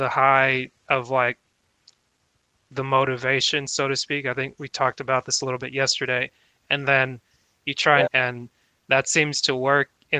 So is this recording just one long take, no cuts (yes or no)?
no